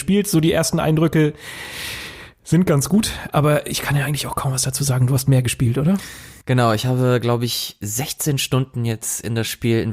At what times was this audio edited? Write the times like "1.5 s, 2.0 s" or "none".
none